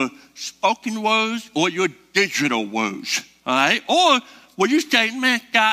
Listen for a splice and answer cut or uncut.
uncut